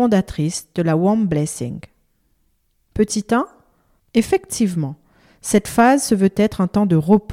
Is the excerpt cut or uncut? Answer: cut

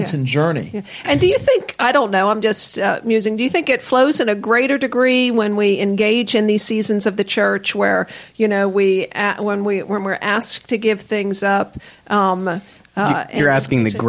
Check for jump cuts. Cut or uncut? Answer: uncut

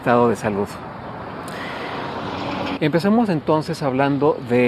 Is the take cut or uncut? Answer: cut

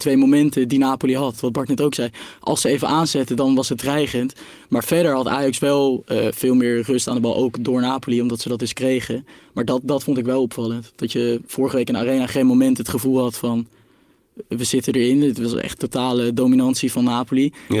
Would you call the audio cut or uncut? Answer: uncut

